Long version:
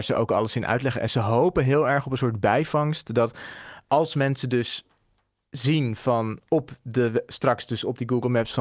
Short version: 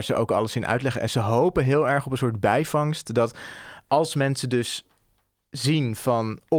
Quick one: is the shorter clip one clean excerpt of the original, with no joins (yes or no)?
yes